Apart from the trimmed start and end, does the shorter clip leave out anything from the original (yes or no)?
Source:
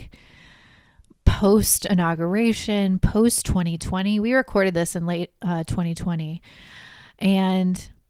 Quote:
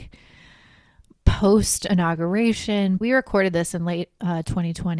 yes